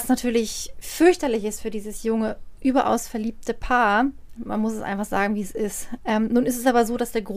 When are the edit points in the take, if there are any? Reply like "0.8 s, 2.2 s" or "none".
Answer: 4.3 s, 6.0 s